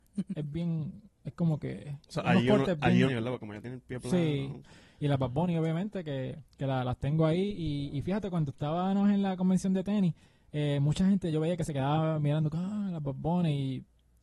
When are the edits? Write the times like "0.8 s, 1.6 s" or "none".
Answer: 3.1 s, 4.6 s, 6.5 s

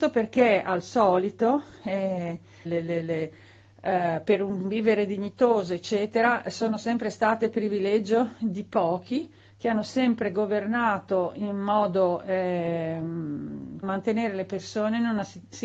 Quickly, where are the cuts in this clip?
2.7 s, 13.8 s

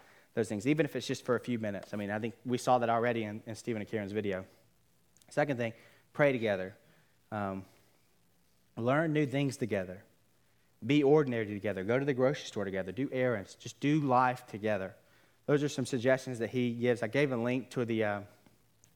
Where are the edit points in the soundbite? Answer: none

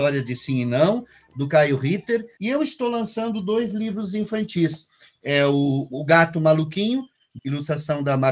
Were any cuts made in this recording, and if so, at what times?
2.4 s, 7.4 s

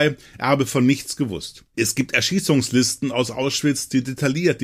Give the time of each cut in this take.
1.7 s

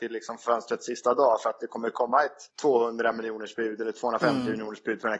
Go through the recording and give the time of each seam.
2.5 s

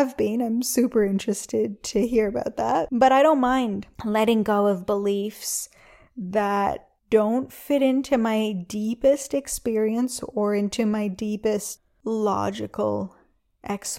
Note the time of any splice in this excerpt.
7.0 s

